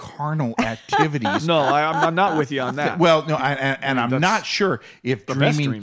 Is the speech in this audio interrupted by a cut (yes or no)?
no